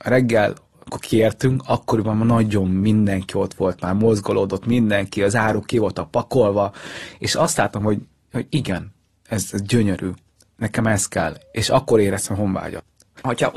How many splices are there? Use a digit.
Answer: 0